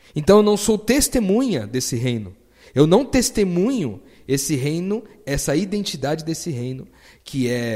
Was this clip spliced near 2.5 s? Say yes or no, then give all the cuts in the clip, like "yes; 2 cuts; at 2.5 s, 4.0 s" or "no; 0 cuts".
no; 0 cuts